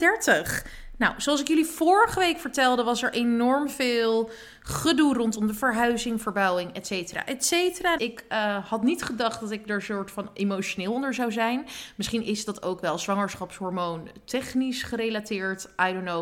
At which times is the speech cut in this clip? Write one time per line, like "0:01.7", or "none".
0:08.0